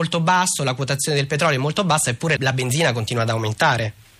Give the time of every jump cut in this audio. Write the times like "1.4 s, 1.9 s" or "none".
2.4 s